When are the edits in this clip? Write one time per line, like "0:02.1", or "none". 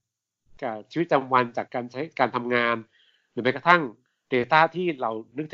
0:01.6